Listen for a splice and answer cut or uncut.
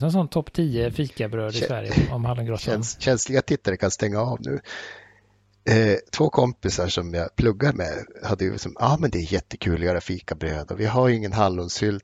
uncut